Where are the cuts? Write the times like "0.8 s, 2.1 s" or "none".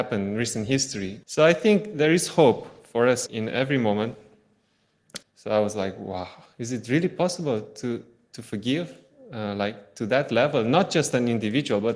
1.2 s, 3.3 s, 5.2 s

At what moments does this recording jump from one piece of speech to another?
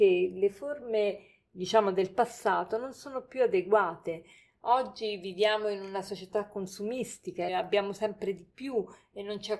7.5 s

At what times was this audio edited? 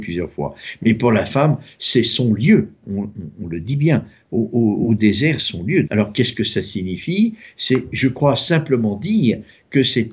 5.9 s

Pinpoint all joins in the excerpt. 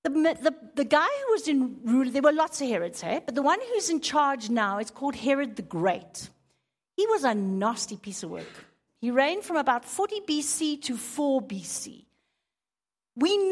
8.9 s

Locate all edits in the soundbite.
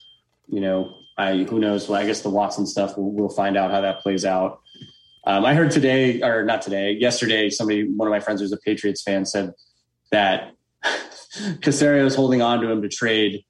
none

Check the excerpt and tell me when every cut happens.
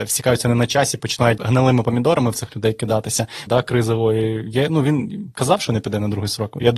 1.4 s, 3.5 s

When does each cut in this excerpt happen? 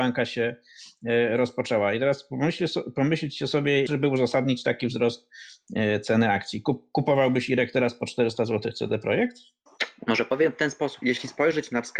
3.9 s, 11.0 s

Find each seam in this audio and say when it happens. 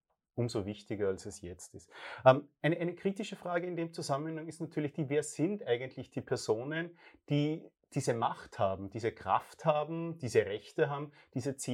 none

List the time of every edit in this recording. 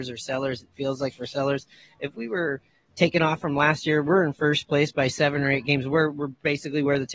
none

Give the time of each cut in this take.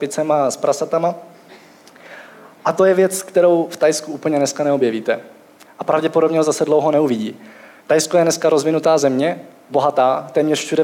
5.7 s

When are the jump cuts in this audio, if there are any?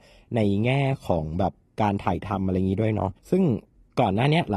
3.2 s

